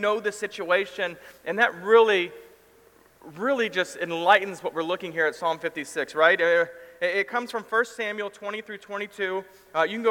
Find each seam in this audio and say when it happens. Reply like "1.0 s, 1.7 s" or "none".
none